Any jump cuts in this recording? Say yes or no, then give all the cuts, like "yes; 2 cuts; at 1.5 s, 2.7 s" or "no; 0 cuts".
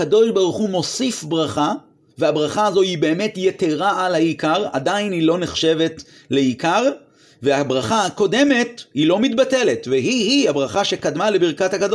no; 0 cuts